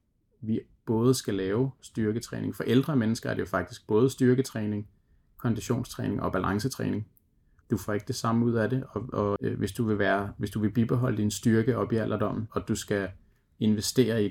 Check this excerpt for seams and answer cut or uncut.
cut